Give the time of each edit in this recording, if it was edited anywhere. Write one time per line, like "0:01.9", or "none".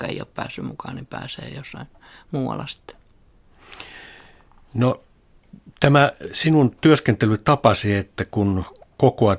none

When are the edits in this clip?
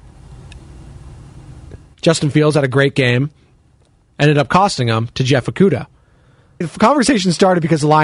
0:01.9
0:04.0
0:06.6

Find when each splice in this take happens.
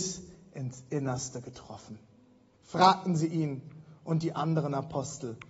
0:02.5

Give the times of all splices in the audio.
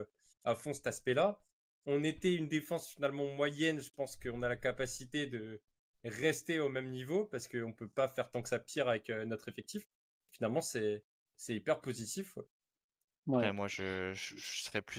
none

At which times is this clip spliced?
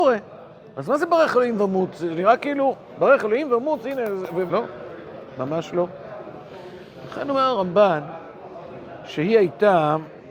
0:04.5

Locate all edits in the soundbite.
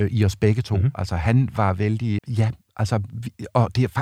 0:02.2

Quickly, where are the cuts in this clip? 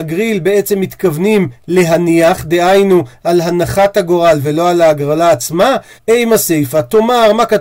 0:06.0

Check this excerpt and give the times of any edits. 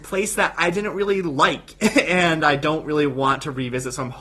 none

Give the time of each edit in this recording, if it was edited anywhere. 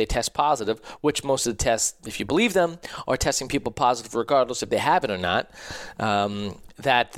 0:02.0

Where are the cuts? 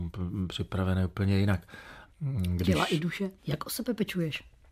0:02.1
0:03.4

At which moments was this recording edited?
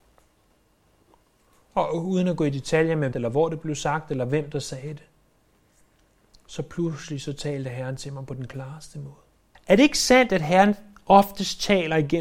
0:03.1
0:09.5

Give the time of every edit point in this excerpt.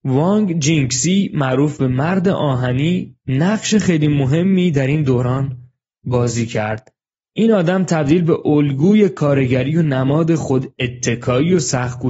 none

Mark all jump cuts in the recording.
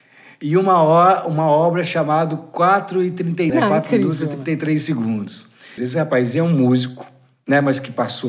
0:03.5
0:05.8

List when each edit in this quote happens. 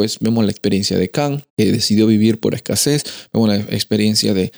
0:01.5

